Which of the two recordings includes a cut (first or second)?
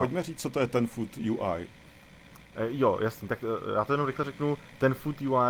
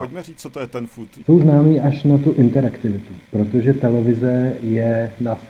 second